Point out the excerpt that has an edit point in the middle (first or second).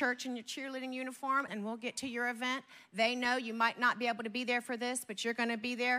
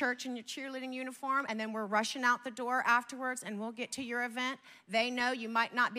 first